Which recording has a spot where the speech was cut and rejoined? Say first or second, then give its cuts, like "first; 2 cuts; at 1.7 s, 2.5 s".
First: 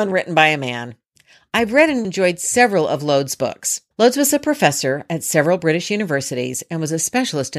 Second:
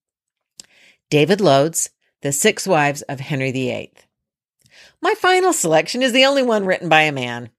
first; 2 cuts; at 2.0 s, 3.9 s